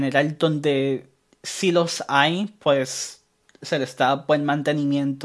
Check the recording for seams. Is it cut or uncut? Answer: uncut